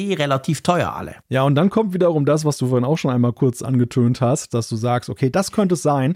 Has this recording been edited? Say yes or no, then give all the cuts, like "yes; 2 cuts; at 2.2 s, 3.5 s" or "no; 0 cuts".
yes; 2 cuts; at 1.2 s, 4.5 s